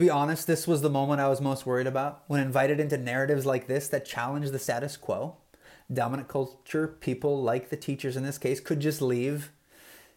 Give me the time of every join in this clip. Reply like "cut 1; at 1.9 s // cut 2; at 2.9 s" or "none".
none

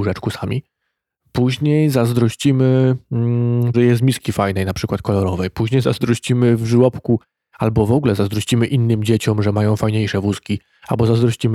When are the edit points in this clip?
cut 1; at 3.7 s

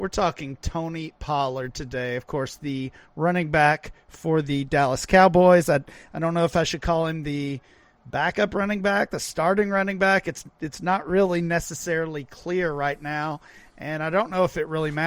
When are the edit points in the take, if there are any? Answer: none

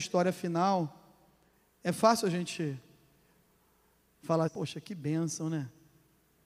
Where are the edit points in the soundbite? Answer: cut 1; at 4.5 s

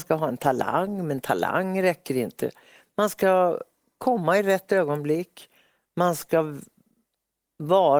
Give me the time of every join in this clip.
none

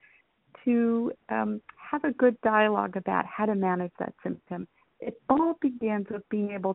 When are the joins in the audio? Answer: none

